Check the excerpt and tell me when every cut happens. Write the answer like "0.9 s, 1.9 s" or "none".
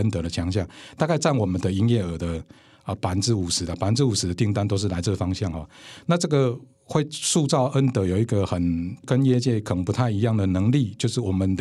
none